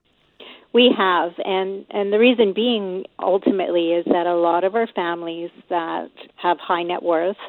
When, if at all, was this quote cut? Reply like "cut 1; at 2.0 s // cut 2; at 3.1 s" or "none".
cut 1; at 6.3 s